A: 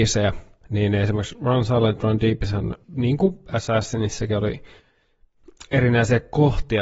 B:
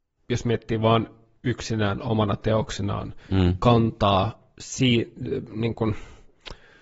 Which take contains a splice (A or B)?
A